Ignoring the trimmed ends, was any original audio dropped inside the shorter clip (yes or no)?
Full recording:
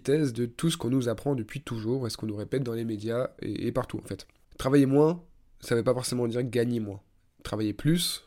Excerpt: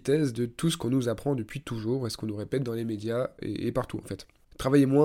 no